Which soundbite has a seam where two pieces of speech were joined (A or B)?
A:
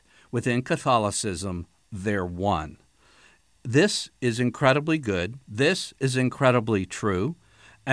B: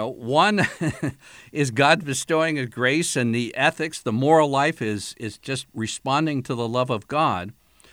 A